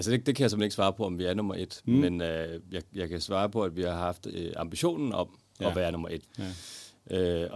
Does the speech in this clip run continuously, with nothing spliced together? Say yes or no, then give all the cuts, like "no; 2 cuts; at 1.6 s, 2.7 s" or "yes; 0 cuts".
no; 1 cut; at 6.3 s